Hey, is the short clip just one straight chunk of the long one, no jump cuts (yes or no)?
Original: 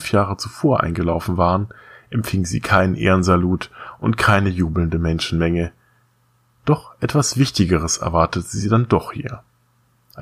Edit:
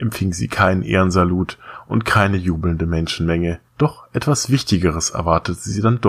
no